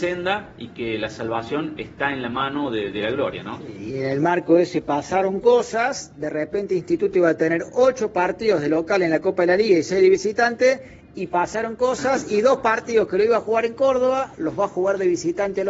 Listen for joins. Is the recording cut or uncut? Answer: uncut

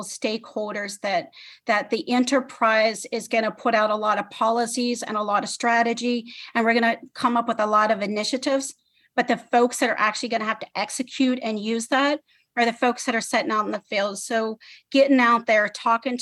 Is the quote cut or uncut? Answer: uncut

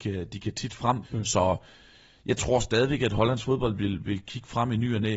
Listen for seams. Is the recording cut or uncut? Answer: cut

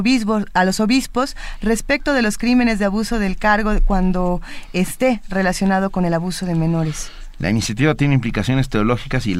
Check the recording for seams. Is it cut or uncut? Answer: uncut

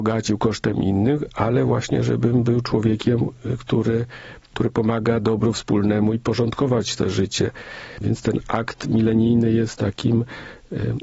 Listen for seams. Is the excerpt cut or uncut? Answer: cut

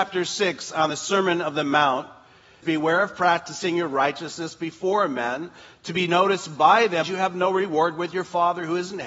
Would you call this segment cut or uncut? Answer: cut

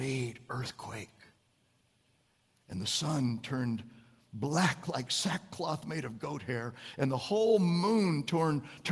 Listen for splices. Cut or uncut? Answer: uncut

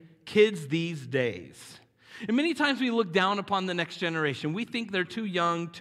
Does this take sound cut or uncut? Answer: uncut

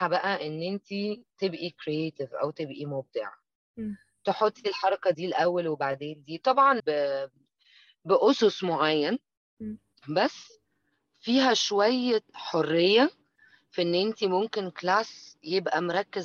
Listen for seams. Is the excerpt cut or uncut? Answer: cut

